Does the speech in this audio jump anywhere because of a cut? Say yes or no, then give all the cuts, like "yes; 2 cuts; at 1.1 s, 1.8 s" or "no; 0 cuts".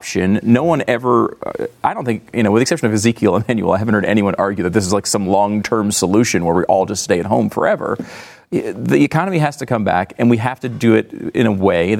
no; 0 cuts